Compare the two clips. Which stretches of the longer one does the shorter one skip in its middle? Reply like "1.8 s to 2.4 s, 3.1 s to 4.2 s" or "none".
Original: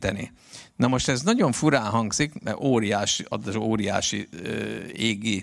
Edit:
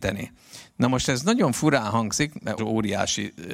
2.6 s to 3.5 s